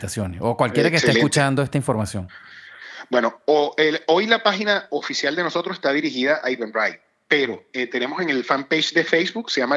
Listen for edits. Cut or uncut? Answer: uncut